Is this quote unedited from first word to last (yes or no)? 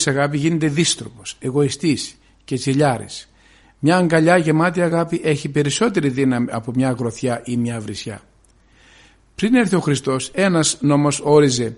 no